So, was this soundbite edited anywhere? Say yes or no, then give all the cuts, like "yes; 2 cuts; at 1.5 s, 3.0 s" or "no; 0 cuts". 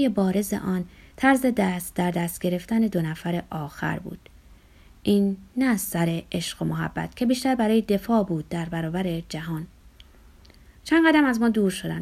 no; 0 cuts